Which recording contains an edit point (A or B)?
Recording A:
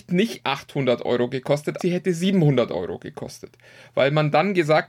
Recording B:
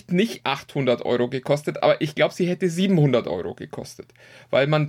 A